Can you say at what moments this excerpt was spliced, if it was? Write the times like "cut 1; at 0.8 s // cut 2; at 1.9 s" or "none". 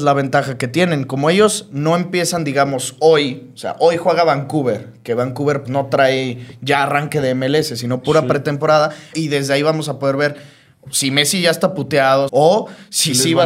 cut 1; at 5.6 s // cut 2; at 9.1 s // cut 3; at 12.3 s